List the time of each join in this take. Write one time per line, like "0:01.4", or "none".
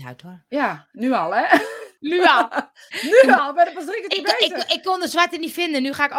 0:02.0